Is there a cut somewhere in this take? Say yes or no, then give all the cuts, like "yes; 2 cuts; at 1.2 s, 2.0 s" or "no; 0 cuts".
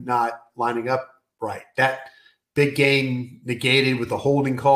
no; 0 cuts